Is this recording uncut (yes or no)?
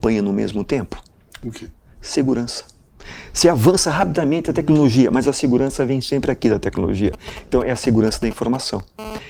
yes